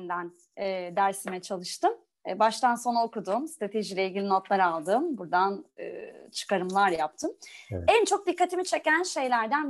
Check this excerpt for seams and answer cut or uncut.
uncut